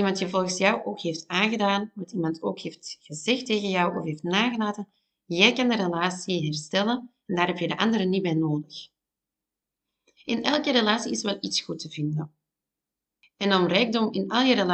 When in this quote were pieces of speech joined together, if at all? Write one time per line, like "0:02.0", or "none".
none